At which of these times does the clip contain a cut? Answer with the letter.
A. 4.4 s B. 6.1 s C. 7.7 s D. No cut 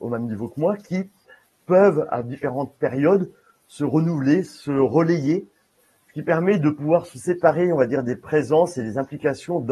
D